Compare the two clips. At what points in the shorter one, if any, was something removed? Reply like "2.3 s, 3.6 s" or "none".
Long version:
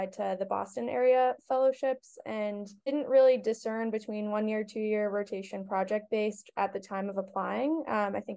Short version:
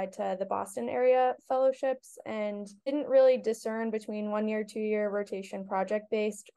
none